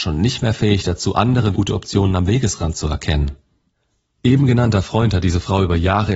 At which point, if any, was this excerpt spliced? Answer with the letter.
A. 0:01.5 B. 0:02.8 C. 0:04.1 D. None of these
A